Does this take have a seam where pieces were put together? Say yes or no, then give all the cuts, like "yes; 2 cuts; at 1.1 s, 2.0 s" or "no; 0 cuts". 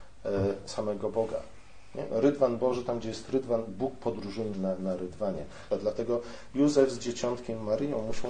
yes; 2 cuts; at 4.5 s, 5.7 s